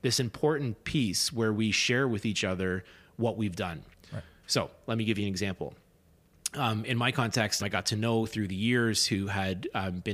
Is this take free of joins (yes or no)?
no